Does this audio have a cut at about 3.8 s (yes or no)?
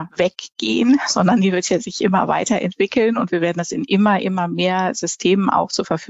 no